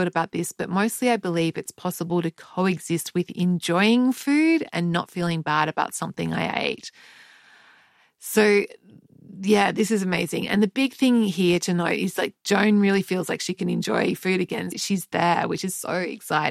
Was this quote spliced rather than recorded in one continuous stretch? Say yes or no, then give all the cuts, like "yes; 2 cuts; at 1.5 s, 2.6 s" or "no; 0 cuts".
yes; 1 cut; at 14.7 s